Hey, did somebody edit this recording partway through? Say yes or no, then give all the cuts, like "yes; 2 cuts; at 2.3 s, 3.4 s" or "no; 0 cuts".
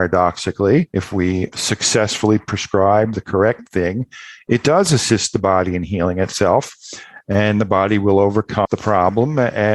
no; 0 cuts